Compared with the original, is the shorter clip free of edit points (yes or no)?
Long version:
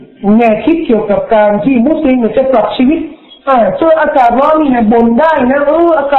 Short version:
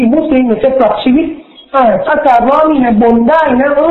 no